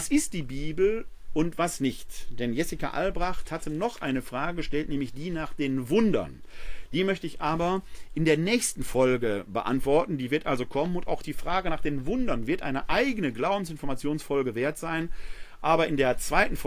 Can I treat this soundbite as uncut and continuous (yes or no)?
yes